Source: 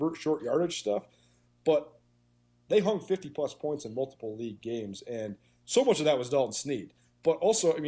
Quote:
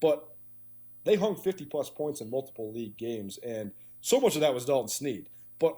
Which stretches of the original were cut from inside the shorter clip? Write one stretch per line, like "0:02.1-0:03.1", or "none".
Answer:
none